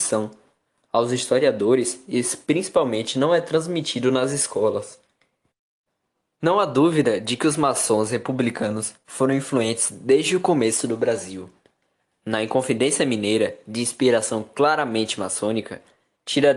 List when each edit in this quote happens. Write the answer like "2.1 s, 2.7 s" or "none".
none